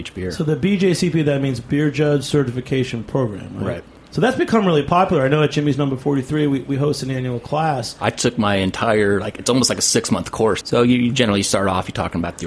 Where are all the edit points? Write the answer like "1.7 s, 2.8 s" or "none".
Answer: 10.6 s